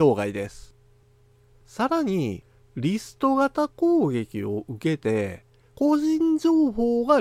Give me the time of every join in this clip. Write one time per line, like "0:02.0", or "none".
0:02.7